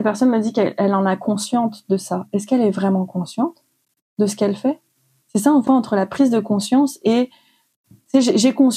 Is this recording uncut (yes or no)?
no